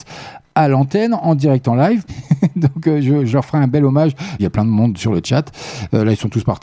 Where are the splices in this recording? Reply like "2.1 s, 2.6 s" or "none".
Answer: 2.1 s, 4.4 s